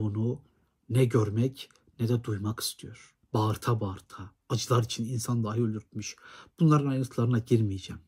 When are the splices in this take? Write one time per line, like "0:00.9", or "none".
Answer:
0:03.2